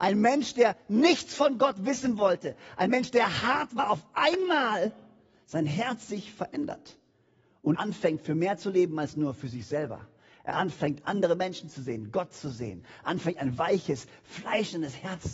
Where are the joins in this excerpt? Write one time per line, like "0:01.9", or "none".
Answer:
0:07.7

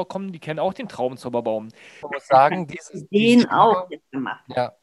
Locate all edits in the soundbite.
0:02.0

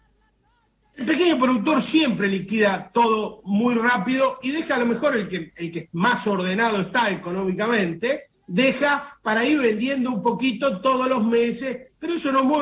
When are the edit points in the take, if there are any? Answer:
none

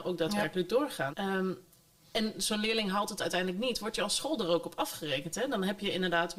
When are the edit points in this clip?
0:01.1

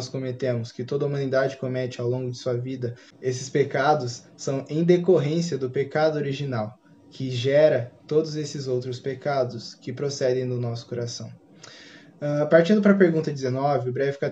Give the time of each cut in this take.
none

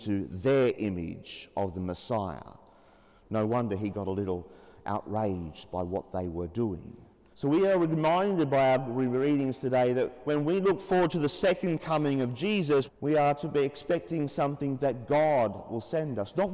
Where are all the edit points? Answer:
0:07.3
0:12.9

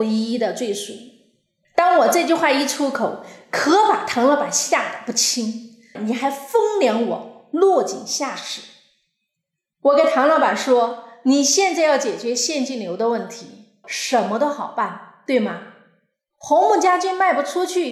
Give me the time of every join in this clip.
0:01.6
0:05.9
0:13.8

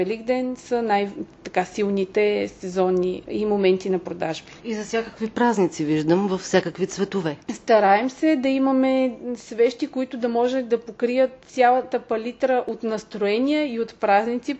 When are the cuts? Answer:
0:04.6

